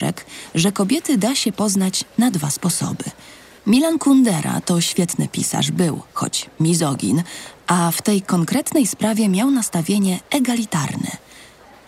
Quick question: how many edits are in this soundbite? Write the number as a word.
one